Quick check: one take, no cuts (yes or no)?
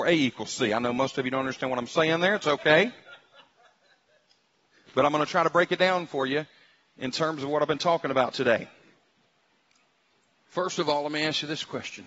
yes